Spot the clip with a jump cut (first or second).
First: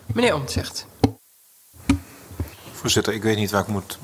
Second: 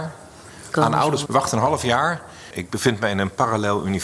second